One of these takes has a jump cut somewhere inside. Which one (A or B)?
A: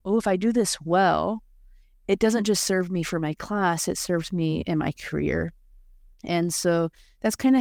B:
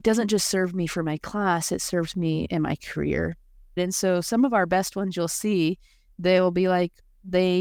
B